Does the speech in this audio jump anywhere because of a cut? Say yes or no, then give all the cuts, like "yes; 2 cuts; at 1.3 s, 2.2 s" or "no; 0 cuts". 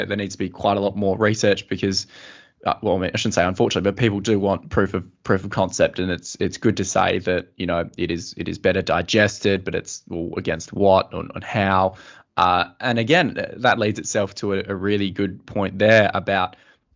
no; 0 cuts